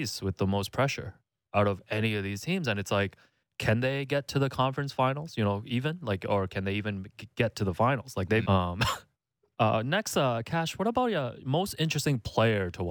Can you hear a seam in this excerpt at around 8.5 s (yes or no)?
yes